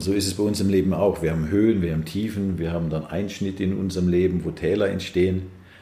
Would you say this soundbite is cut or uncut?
uncut